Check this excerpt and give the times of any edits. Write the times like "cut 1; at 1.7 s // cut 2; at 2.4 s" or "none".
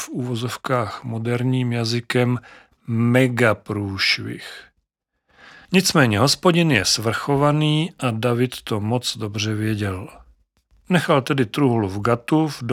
cut 1; at 5.7 s